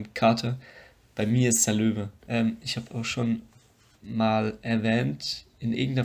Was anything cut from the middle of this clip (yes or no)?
yes